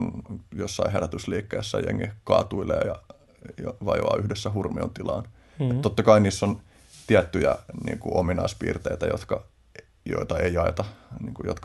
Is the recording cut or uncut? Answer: uncut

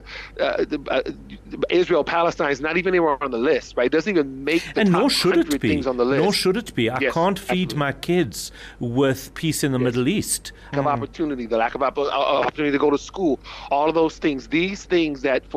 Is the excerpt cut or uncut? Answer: cut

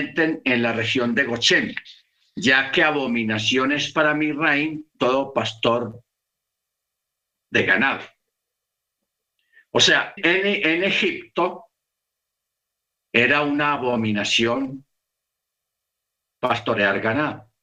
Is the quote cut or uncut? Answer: cut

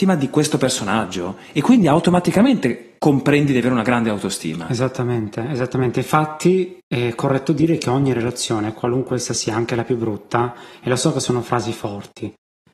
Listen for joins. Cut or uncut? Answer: uncut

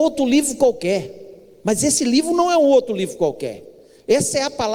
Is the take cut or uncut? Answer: uncut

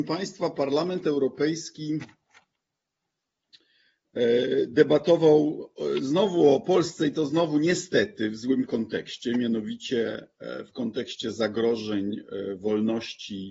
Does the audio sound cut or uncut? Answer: uncut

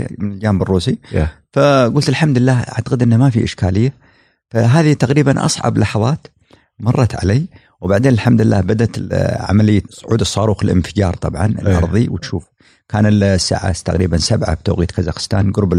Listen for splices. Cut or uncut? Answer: uncut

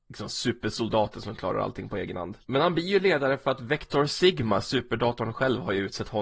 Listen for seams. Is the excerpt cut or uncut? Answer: cut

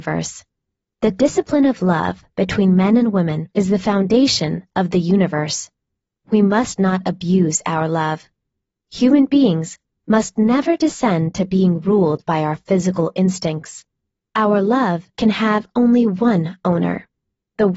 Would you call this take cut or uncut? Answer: cut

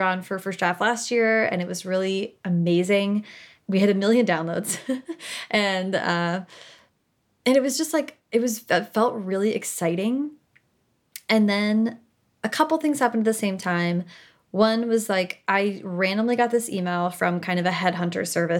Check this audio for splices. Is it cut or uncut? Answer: uncut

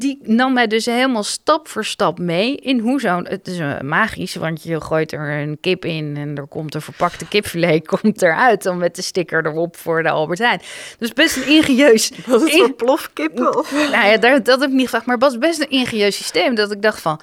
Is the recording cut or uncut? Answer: uncut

